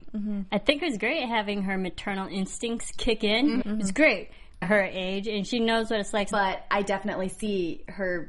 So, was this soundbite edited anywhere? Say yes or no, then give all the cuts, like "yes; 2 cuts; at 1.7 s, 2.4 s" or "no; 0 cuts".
yes; 3 cuts; at 3.6 s, 4.6 s, 6.3 s